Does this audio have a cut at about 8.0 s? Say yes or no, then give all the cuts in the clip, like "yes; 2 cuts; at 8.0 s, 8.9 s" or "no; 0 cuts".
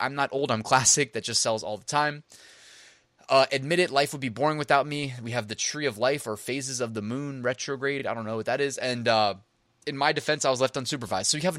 no; 0 cuts